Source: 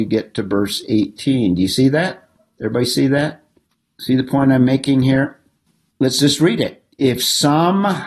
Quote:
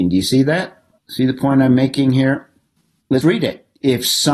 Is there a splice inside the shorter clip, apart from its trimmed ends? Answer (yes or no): yes